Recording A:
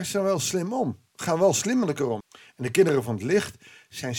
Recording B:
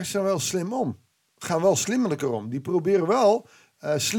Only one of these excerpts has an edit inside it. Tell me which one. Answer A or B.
A